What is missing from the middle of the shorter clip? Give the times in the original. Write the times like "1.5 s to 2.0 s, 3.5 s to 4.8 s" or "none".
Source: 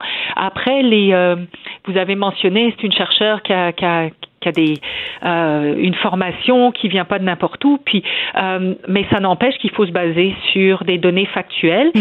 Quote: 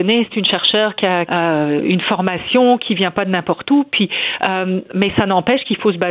3.7 s to 5.2 s